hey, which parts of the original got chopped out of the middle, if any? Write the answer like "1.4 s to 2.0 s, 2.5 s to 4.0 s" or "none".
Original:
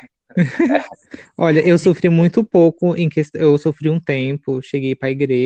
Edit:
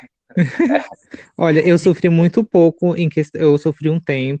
none